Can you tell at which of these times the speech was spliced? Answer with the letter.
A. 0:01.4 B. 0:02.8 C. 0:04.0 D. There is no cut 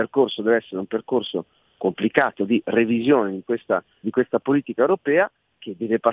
C